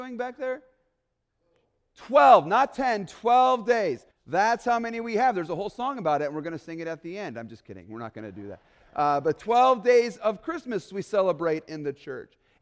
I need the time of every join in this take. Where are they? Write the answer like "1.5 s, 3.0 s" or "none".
4.1 s